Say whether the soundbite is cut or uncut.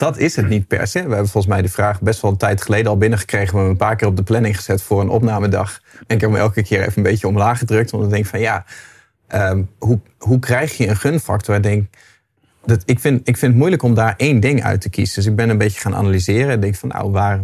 cut